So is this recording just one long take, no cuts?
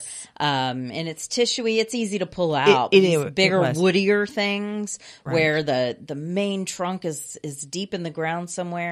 yes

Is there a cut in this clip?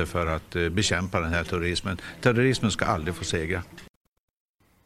no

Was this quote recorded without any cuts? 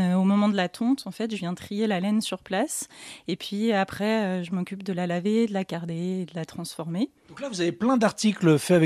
yes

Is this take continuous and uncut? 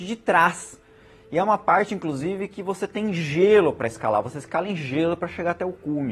yes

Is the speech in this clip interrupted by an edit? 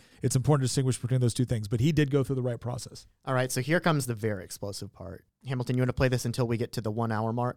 yes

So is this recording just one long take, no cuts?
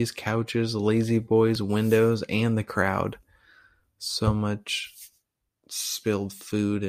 yes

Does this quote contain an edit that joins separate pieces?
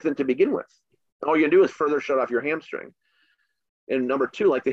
no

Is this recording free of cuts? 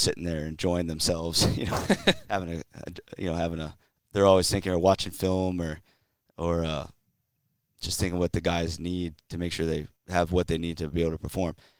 no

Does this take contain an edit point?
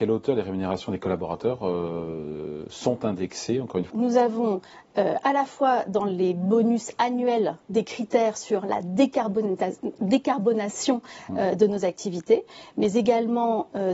yes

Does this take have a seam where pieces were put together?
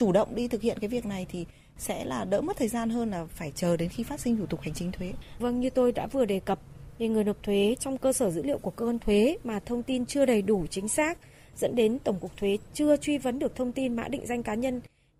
no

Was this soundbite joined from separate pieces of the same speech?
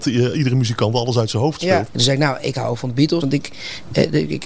yes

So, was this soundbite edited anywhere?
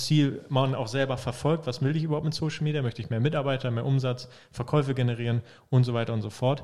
no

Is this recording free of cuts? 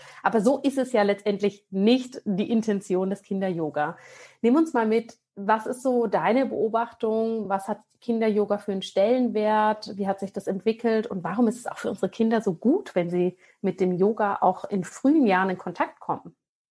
yes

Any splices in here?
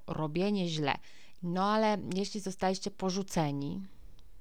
yes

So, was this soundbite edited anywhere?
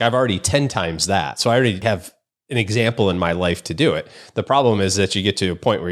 no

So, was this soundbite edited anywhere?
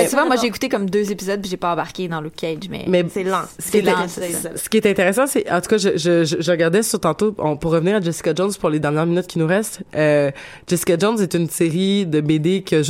no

